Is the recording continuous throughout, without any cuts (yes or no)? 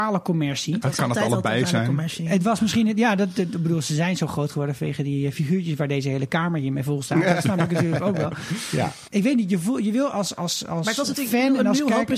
no